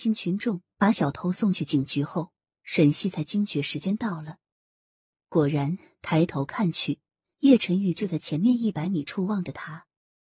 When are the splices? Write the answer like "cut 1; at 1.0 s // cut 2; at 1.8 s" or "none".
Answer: none